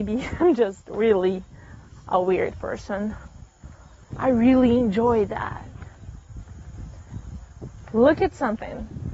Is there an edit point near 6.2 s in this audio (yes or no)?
no